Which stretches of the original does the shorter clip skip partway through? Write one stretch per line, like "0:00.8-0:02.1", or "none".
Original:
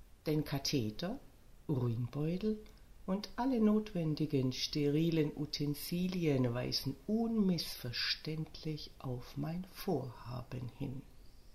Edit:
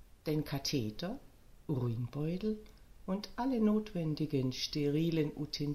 none